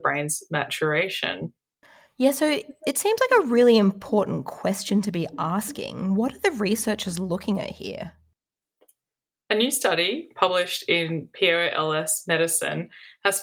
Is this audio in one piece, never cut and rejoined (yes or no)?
yes